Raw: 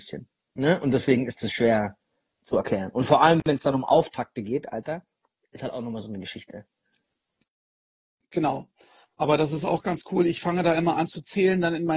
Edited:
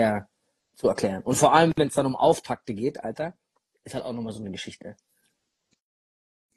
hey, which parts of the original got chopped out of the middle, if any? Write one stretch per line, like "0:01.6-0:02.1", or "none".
none